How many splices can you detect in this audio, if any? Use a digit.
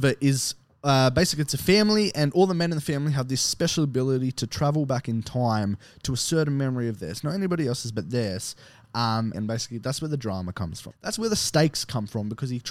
2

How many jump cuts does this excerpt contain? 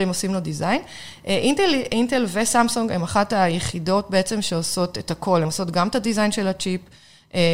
0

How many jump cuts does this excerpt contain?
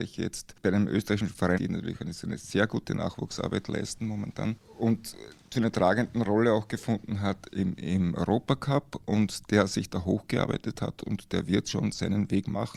1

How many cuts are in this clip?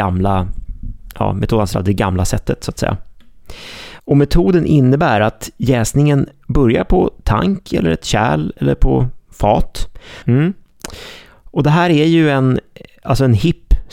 2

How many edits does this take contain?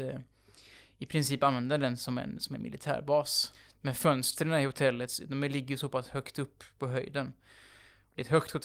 0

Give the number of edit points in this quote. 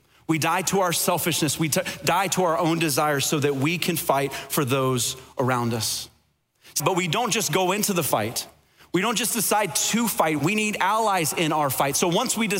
2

